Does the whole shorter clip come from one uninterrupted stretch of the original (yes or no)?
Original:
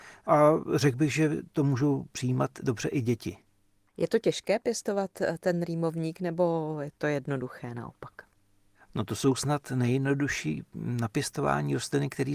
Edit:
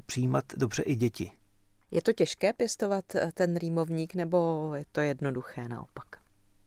yes